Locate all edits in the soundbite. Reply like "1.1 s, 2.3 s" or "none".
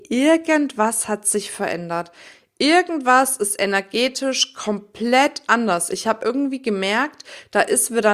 none